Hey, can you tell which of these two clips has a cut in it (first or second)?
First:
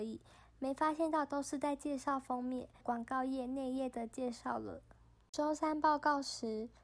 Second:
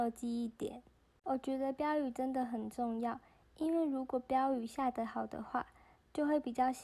first